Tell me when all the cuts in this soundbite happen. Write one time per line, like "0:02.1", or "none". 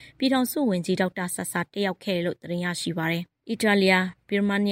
none